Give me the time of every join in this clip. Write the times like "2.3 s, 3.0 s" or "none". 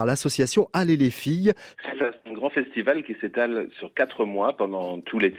1.7 s